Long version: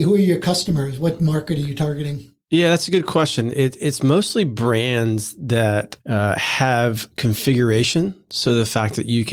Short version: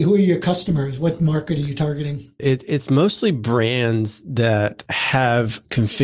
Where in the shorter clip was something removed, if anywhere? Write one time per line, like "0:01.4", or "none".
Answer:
0:02.4
0:04.9